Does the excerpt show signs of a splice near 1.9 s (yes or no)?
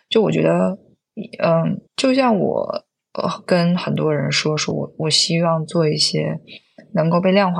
yes